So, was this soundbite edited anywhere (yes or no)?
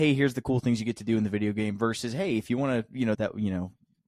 yes